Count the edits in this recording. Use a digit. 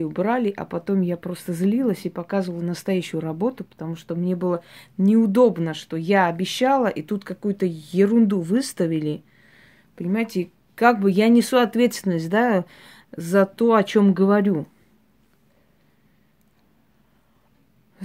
0